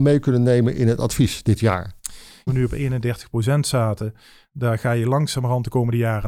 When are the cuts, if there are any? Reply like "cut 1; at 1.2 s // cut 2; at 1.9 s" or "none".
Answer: cut 1; at 2.5 s